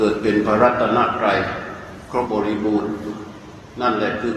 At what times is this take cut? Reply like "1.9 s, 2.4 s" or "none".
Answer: 2.3 s